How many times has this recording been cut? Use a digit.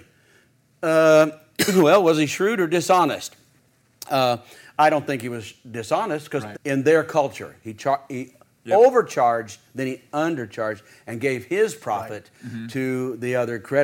1